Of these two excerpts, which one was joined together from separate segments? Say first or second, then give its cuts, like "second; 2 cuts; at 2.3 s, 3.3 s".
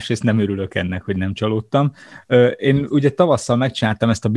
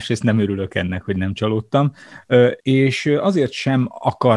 second; 1 cut; at 2.6 s